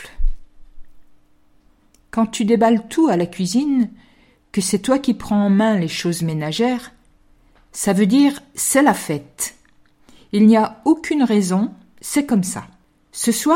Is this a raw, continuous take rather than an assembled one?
yes; 0 cuts

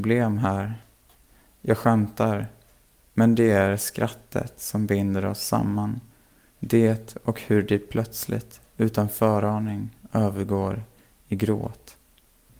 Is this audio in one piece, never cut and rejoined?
yes; 0 cuts

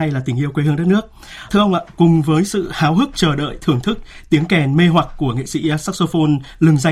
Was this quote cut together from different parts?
yes; 1 cut; at 1.5 s

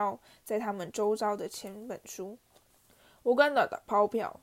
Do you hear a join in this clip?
no; 0 cuts

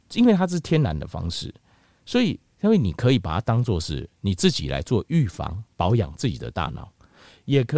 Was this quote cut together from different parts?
no; 0 cuts

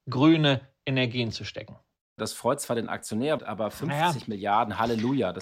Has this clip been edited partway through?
yes; 2 cuts; at 2.2 s, 3.4 s

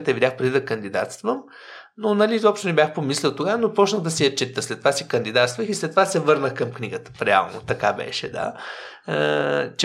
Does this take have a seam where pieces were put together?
no; 0 cuts

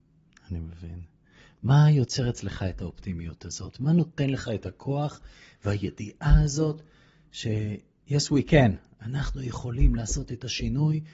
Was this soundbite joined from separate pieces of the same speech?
no; 0 cuts

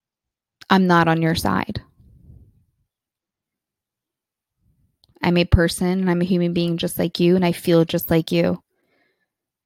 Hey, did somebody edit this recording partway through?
no; 0 cuts

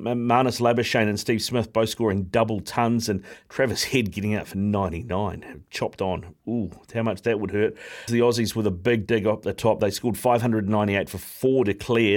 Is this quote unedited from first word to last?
no; 1 cut; at 8.1 s

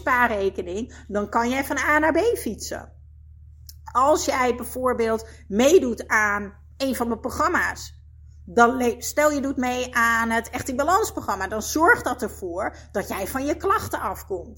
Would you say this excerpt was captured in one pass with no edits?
yes; 0 cuts

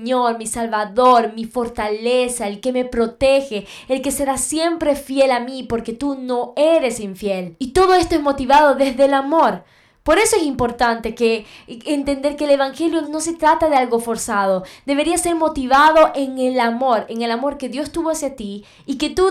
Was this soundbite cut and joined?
yes; 1 cut; at 13.0 s

